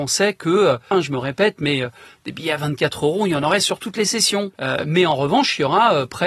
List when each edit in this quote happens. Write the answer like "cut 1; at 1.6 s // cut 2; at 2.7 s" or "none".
cut 1; at 0.9 s // cut 2; at 4.5 s